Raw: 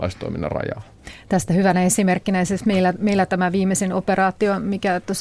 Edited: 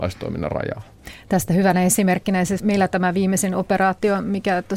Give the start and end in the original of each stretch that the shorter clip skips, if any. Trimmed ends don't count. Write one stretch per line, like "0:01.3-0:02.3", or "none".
0:02.6-0:03.0